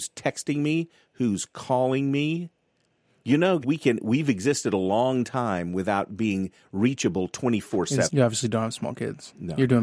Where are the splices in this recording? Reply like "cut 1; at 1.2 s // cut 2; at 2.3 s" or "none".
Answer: cut 1; at 3.6 s // cut 2; at 8.1 s